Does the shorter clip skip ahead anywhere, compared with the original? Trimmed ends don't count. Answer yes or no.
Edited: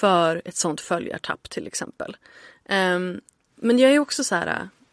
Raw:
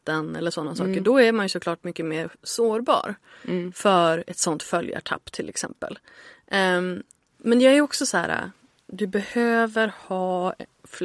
no